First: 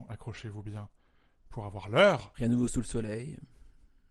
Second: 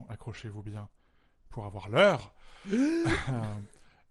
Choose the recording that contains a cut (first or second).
first